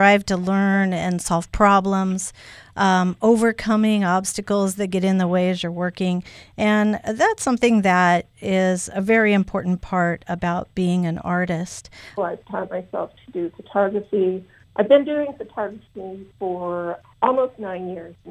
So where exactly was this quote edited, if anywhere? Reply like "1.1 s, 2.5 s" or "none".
12.2 s, 17.0 s